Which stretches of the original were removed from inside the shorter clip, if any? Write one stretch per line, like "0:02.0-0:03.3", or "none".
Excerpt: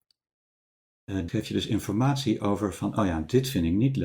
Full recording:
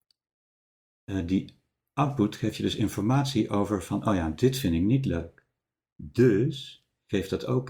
0:01.3-0:02.4

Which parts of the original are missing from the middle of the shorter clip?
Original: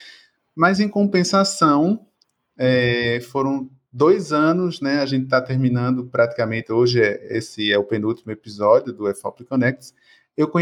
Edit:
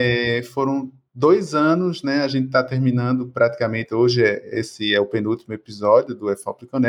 none

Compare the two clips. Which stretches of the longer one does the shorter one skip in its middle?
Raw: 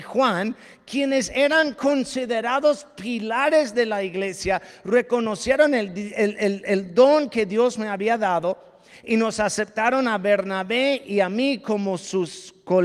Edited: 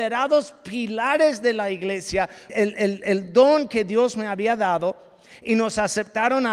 0:04.8-0:06.1

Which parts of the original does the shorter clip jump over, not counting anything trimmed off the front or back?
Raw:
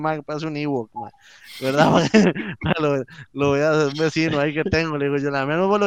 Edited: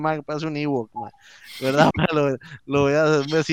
0:01.9-0:02.6

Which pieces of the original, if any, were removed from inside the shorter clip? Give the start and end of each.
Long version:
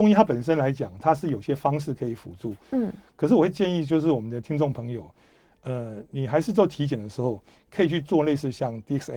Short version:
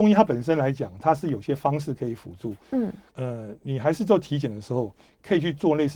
0:03.1-0:05.6

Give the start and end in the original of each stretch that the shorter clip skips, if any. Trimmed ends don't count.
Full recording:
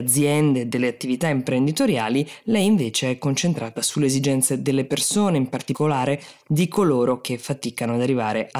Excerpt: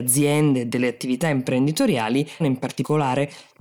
0:02.4-0:05.3

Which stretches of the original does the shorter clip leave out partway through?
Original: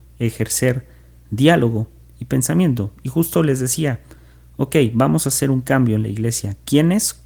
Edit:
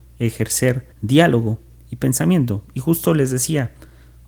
0:00.9-0:01.2

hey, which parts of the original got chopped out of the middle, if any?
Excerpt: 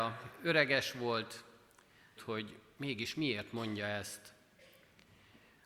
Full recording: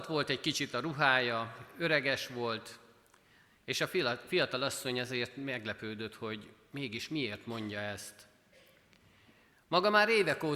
0:03.5-0:06.1

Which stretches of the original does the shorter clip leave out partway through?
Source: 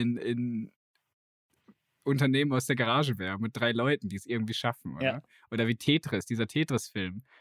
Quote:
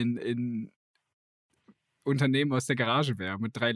none

